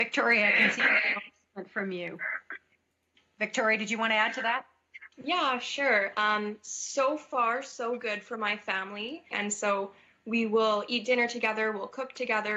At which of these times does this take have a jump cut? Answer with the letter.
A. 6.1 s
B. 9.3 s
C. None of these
B